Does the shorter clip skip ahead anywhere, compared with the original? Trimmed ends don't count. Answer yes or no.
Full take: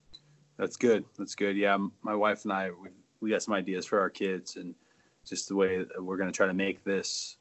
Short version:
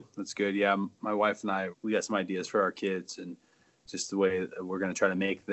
yes